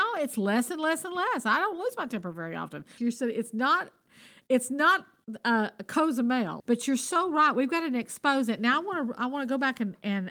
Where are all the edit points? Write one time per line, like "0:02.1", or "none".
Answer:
0:03.0
0:06.6